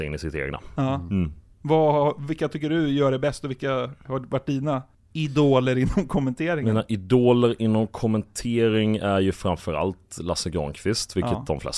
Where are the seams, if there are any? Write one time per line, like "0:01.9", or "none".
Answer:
none